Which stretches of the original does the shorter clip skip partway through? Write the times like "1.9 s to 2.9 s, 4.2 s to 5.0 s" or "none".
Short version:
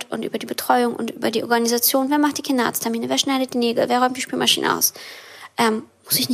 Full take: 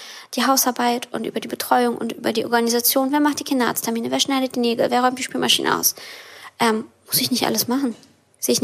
none

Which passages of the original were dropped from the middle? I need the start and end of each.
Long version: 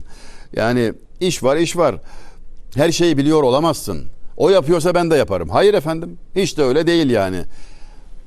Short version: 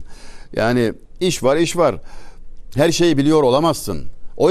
none

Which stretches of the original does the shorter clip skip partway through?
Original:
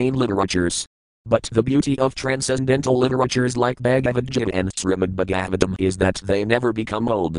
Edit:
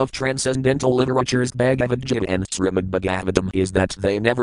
3.5 s to 3.8 s

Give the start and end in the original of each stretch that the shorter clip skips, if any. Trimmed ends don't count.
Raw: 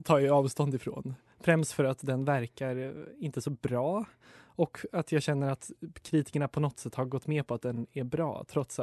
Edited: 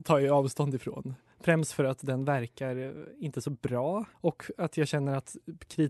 4.1 s to 4.5 s

